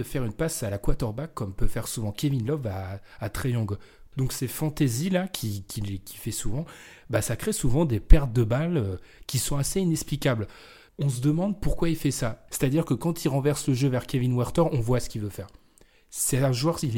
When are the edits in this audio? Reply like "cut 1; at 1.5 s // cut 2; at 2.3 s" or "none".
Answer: cut 1; at 4.1 s // cut 2; at 12.5 s